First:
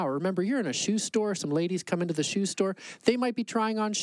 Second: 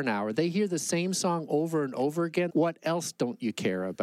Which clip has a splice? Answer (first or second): second